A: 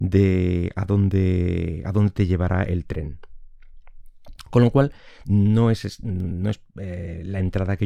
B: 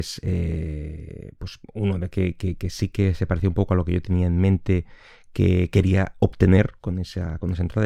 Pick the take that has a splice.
B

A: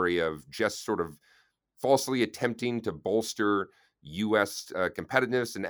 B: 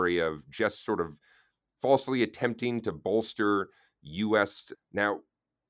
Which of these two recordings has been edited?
B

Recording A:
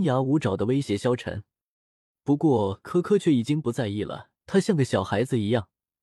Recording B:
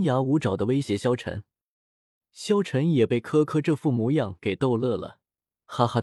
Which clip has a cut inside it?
A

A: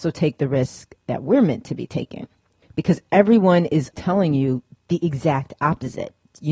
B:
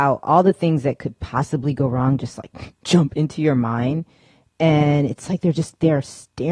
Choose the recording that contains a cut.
A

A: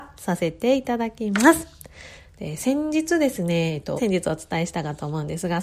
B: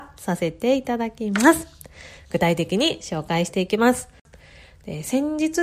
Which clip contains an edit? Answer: A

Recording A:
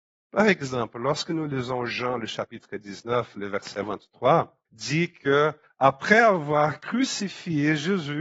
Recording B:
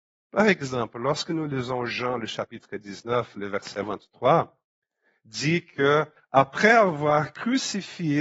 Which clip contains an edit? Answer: A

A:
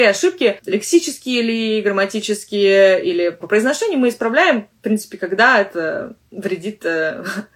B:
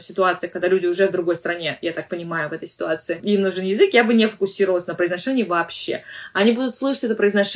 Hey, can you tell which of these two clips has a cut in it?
A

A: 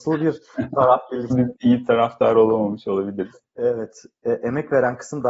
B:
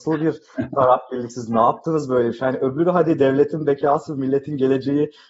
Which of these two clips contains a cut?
A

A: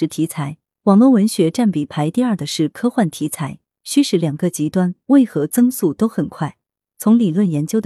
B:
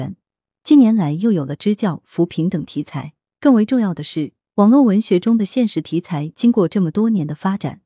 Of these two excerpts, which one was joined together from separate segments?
A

